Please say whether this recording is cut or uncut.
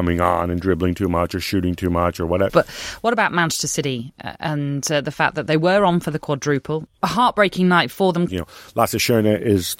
cut